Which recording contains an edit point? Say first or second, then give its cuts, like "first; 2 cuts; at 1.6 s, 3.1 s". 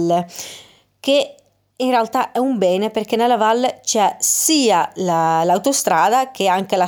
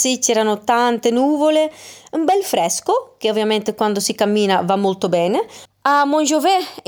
second; 1 cut; at 5.7 s